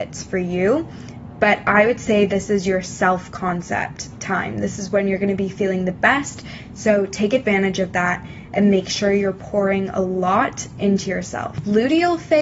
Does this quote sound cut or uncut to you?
uncut